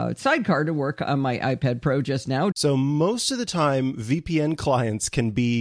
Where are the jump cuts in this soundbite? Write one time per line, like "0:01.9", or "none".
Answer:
0:02.5